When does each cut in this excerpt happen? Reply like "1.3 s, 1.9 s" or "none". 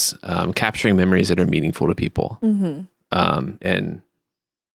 3.6 s